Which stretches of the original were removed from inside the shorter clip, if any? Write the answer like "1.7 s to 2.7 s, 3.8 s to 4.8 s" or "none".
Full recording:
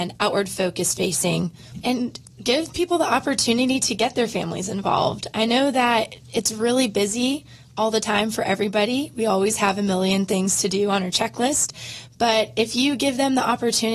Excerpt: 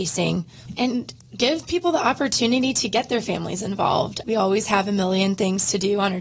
5.3 s to 9.1 s